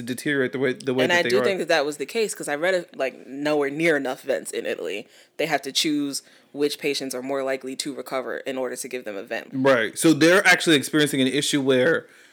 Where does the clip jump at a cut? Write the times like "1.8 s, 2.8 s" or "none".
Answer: 2.9 s, 9.5 s